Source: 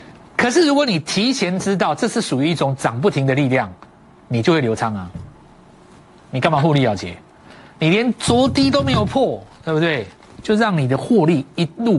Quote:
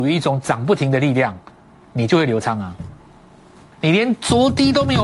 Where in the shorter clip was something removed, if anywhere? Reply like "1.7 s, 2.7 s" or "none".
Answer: 3.7 s